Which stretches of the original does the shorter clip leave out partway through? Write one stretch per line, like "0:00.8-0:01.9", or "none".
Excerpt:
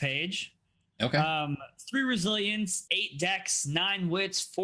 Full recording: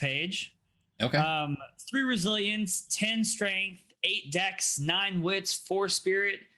0:02.9-0:04.0